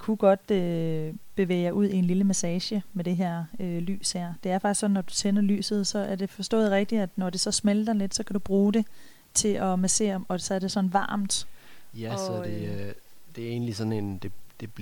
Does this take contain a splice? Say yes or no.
no